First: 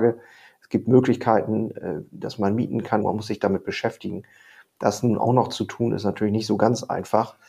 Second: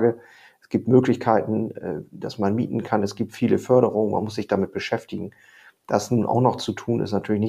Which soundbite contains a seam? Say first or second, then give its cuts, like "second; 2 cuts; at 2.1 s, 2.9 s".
first; 1 cut; at 3.0 s